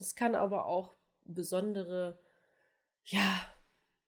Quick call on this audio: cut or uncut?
uncut